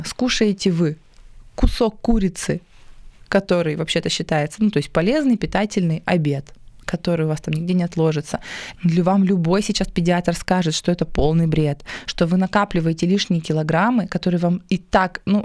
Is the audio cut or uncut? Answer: cut